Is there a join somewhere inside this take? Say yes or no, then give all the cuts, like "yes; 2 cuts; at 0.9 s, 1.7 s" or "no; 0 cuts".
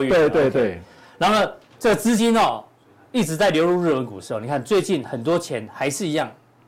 no; 0 cuts